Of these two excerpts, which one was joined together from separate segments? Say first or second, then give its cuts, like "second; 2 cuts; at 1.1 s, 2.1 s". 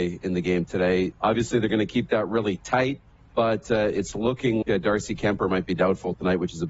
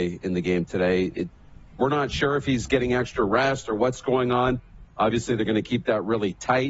first; 2 cuts; at 1.1 s, 4.6 s